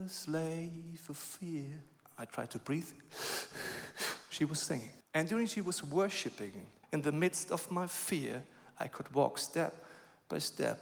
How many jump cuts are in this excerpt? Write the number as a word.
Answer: two